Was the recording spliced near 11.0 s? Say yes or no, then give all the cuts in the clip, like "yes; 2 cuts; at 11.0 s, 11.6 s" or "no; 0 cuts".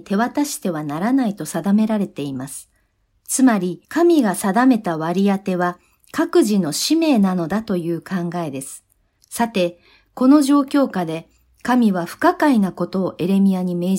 no; 2 cuts; at 3.8 s, 9.2 s